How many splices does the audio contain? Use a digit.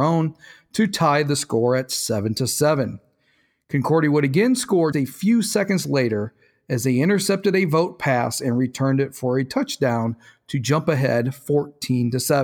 1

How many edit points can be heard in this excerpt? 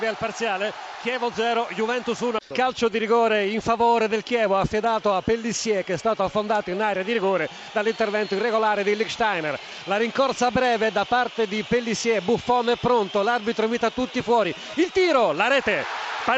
0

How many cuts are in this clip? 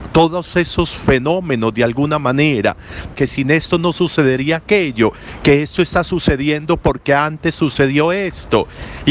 1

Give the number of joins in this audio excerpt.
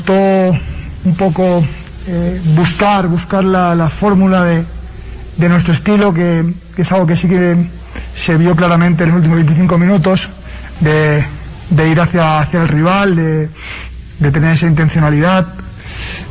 1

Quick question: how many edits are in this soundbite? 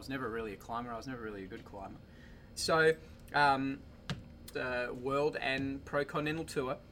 2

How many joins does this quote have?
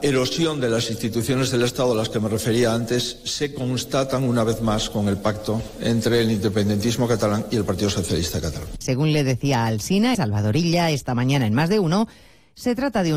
2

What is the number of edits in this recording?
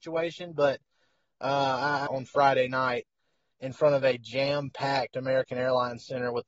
1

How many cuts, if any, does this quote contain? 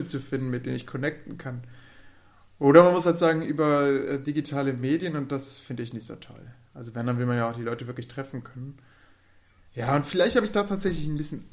0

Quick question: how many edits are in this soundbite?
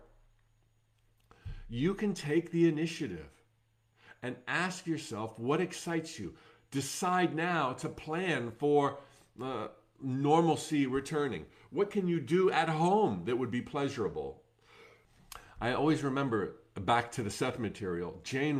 0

